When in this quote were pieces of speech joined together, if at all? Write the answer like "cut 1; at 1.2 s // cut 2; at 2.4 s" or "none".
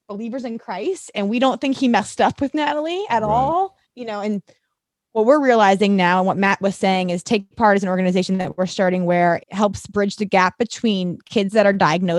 cut 1; at 3.9 s // cut 2; at 9.4 s

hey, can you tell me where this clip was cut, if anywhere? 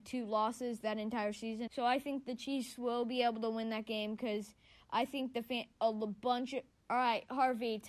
cut 1; at 1.7 s // cut 2; at 6.7 s

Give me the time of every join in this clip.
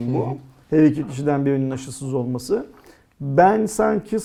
none

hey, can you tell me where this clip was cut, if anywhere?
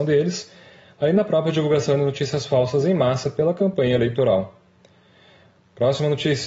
none

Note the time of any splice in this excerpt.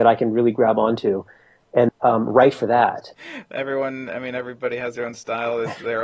cut 1; at 1.9 s // cut 2; at 3.1 s

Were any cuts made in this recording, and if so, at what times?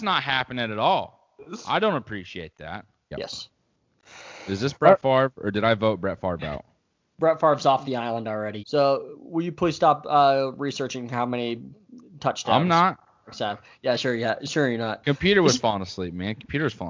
cut 1; at 3.1 s // cut 2; at 8.6 s

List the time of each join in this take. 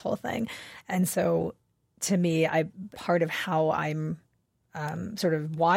cut 1; at 2.9 s

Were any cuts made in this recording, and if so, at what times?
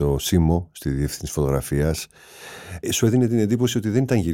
cut 1; at 2.8 s

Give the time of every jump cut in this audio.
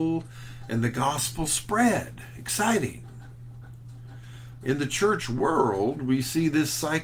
cut 1; at 4.6 s

